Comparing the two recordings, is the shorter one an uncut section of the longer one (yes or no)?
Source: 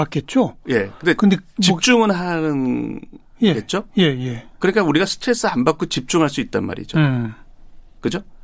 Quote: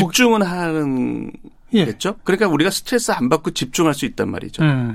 no